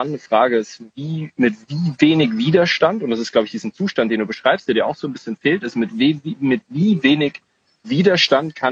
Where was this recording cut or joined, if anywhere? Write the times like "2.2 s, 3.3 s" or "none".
none

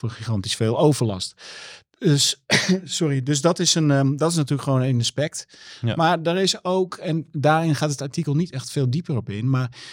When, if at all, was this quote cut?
none

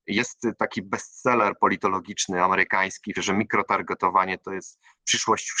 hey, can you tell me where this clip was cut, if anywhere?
3.1 s

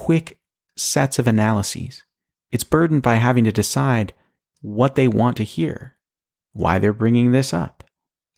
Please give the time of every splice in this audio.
none

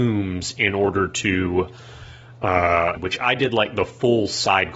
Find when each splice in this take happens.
3.0 s

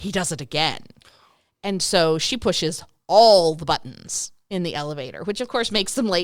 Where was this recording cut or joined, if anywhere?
none

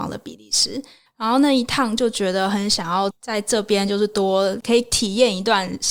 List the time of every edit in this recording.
1.1 s, 3.1 s

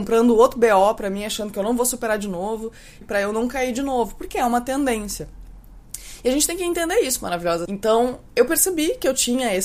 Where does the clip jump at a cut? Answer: 3.0 s, 7.7 s

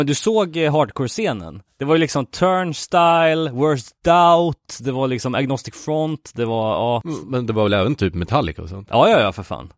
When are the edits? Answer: none

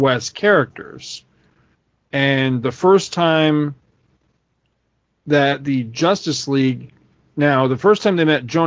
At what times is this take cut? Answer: none

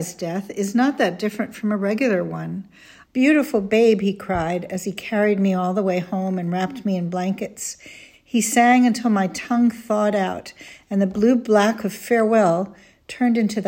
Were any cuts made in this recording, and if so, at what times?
3.0 s, 8.1 s

